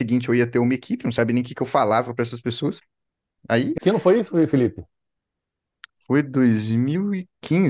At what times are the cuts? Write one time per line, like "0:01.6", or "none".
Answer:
0:03.4